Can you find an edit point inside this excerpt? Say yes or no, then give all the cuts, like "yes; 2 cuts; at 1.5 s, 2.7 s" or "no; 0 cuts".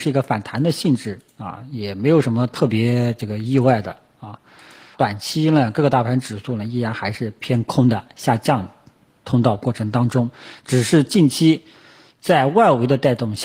yes; 1 cut; at 4.9 s